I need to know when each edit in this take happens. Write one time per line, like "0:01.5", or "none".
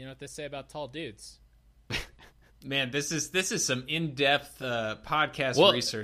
0:02.6